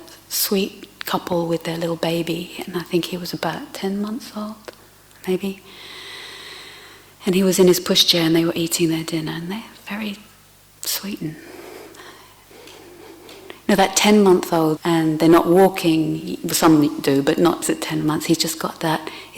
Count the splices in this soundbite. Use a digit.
3